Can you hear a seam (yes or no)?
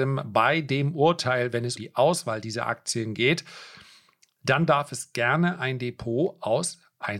yes